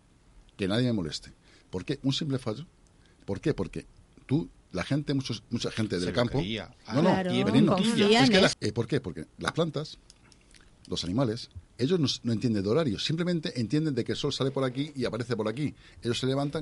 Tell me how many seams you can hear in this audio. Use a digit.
2